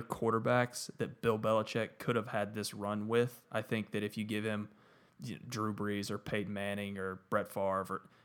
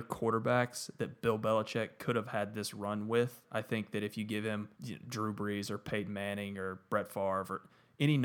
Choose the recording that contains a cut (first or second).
second